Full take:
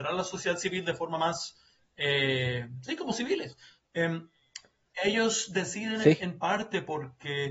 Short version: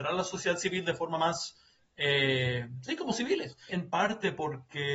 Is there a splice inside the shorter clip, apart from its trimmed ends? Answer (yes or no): yes